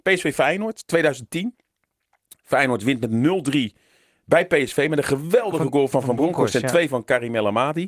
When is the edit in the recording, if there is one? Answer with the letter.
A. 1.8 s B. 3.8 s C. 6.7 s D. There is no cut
D